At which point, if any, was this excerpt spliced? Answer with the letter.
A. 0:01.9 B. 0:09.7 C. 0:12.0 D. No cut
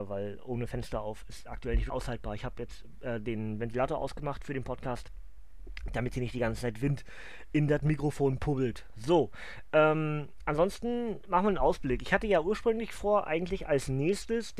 A